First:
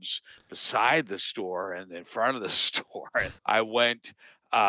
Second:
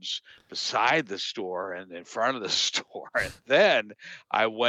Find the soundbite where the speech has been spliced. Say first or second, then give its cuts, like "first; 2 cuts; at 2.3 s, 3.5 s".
first; 1 cut; at 3.4 s